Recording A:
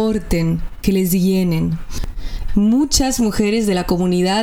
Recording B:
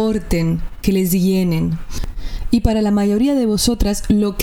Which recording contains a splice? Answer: A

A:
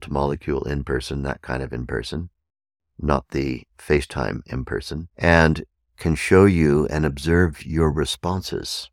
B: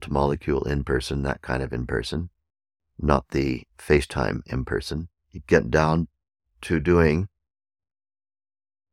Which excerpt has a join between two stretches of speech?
B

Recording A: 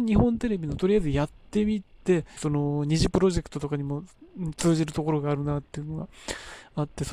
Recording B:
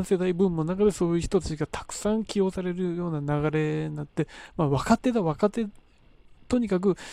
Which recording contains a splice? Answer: A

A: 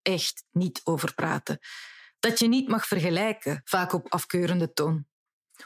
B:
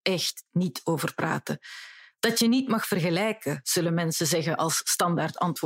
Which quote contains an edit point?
A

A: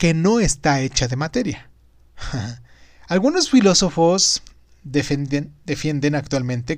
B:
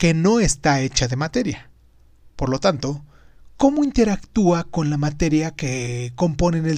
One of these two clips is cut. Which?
A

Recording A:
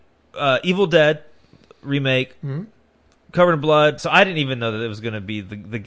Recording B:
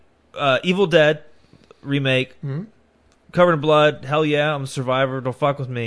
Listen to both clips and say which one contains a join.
A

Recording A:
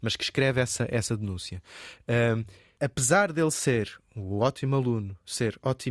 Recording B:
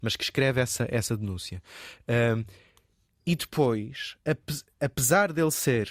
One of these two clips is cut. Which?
A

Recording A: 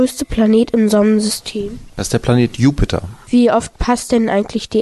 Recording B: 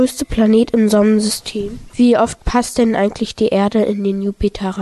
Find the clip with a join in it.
B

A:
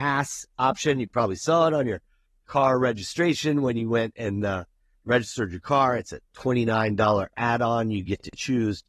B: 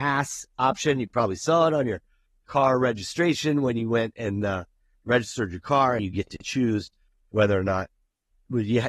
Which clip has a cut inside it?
B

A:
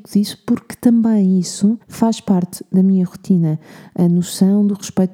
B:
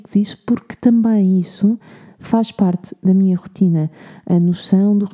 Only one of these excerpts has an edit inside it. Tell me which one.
A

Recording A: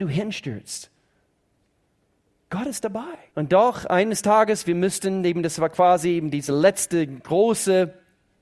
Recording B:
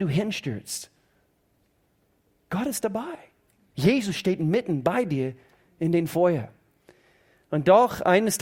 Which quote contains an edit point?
A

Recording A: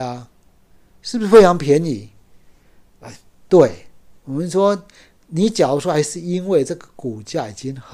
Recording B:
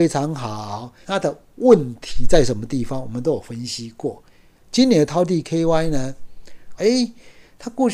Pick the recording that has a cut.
B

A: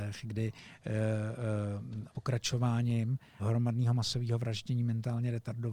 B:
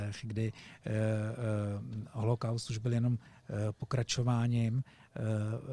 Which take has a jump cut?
A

